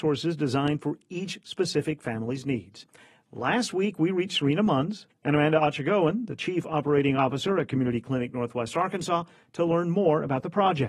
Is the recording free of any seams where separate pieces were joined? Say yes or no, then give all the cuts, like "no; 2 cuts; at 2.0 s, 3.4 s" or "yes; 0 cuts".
no; 1 cut; at 5.1 s